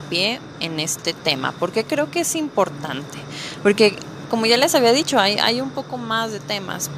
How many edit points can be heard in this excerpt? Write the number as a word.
zero